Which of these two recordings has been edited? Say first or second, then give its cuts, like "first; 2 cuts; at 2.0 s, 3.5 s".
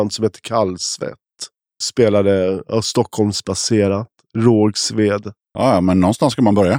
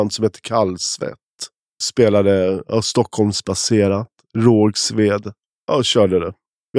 first; 1 cut; at 5.4 s